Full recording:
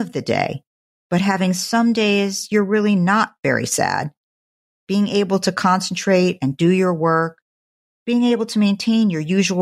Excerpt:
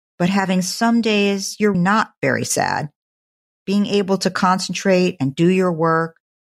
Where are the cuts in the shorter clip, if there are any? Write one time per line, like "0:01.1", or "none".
0:01.7